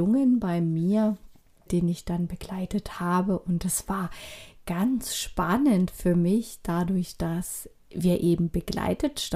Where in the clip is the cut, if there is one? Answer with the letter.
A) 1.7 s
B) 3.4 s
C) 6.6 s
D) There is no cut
A